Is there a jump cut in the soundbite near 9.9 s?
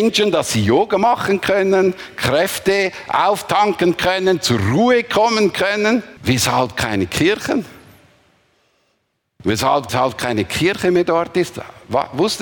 yes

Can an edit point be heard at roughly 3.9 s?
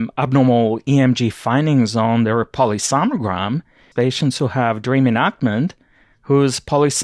yes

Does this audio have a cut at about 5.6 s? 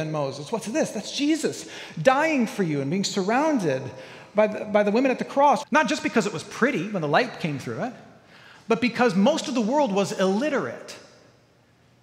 yes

